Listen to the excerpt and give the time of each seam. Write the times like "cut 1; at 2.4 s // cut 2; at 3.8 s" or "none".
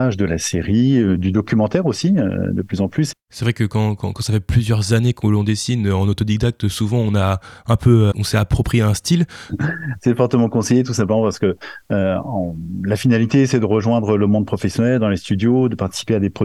cut 1; at 3.1 s // cut 2; at 8.1 s // cut 3; at 9.5 s